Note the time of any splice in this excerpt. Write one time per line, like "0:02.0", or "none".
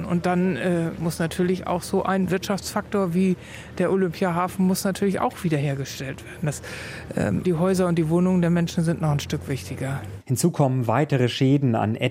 0:07.4
0:10.2